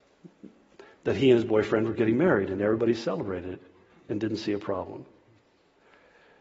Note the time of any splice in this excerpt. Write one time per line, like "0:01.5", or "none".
none